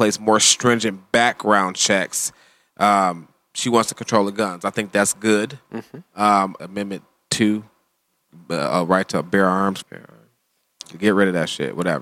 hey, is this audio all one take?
no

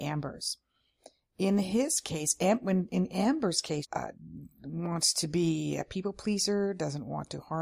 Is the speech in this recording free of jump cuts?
no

